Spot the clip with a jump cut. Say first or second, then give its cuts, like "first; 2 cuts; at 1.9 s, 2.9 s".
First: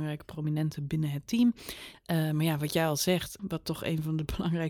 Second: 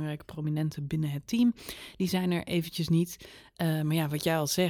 first; 2 cuts; at 1.9 s, 3.4 s